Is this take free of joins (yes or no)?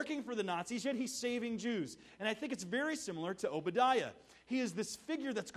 yes